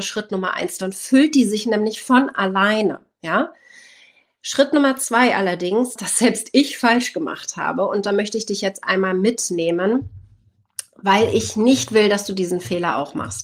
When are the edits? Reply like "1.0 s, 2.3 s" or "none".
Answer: 6.0 s